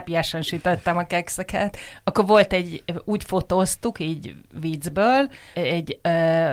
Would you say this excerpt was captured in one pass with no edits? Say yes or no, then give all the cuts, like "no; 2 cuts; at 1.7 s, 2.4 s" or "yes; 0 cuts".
no; 1 cut; at 5.5 s